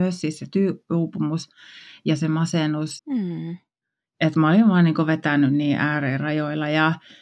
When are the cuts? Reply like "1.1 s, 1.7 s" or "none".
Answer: 3.0 s